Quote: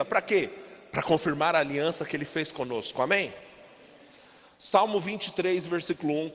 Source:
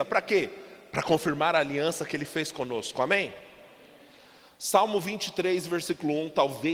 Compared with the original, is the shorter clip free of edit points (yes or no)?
yes